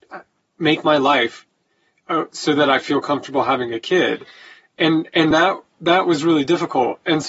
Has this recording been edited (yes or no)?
no